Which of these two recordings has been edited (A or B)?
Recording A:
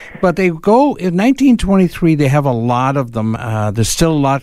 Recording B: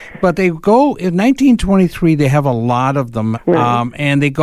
B